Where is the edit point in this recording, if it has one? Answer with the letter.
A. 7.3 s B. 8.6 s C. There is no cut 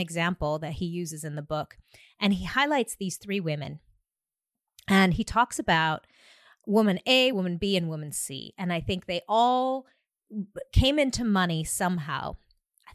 C